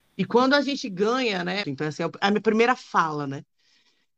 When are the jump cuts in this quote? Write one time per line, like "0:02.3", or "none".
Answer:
0:01.6